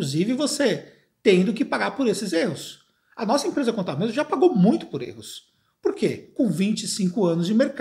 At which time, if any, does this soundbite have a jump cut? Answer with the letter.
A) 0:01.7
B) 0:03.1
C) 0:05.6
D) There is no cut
D